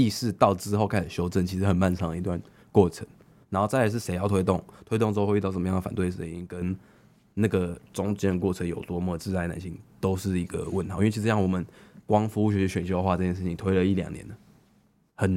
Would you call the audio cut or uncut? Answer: uncut